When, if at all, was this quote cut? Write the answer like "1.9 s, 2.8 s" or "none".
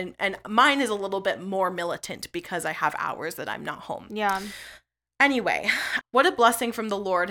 6.0 s